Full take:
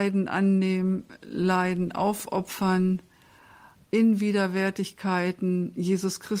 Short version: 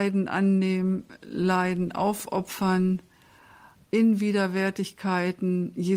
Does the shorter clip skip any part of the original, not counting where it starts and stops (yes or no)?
no